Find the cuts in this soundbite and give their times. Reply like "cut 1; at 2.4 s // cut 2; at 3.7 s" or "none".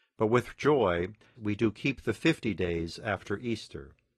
cut 1; at 1.4 s